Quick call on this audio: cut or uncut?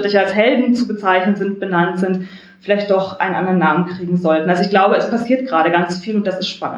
uncut